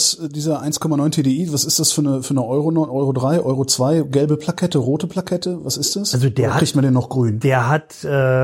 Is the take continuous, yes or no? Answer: yes